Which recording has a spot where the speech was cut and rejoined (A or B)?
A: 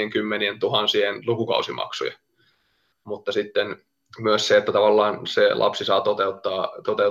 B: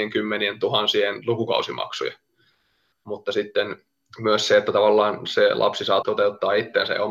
B